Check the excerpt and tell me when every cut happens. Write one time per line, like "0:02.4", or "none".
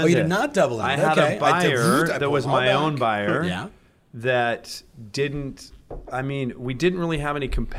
none